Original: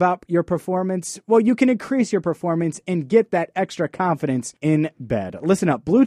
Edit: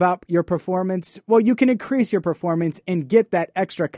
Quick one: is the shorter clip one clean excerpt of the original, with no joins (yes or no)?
yes